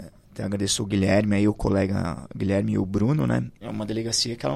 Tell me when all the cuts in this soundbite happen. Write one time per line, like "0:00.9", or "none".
0:03.6